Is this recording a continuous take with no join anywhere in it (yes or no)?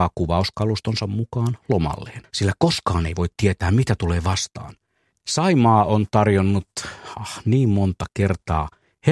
no